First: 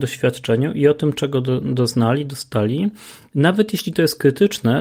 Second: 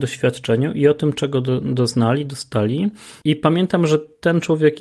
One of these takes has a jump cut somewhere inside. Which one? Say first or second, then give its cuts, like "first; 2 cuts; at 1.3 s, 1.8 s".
second; 1 cut; at 3.2 s